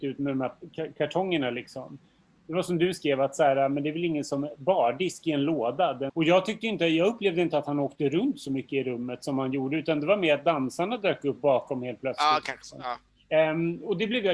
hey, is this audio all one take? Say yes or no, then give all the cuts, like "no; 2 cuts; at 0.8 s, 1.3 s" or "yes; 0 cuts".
no; 1 cut; at 6.1 s